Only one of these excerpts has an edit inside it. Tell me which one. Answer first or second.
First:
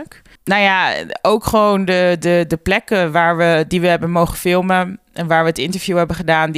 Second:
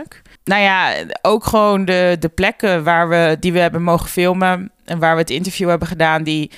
second